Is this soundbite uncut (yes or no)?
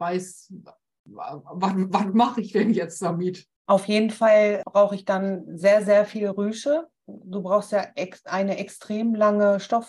yes